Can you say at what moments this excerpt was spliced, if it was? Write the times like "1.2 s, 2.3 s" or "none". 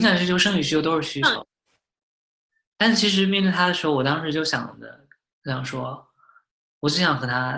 none